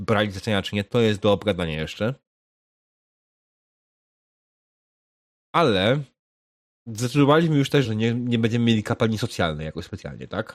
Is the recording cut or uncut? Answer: cut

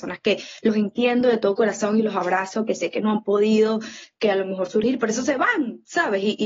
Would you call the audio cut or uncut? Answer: uncut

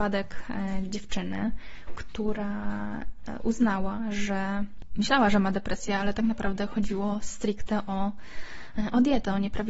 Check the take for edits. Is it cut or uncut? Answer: uncut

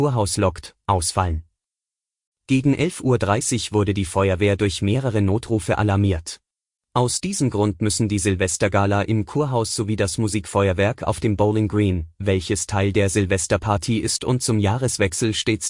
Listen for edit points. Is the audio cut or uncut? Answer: cut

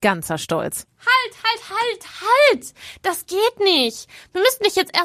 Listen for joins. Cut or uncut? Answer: uncut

